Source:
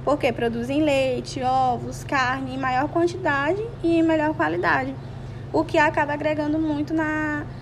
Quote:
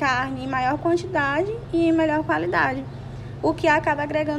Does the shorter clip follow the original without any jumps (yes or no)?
yes